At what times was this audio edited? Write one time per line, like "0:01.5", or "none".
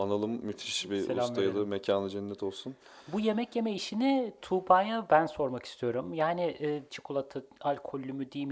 0:06.9